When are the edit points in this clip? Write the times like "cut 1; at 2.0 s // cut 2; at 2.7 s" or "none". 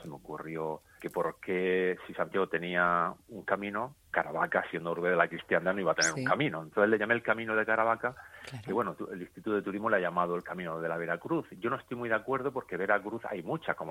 cut 1; at 1.0 s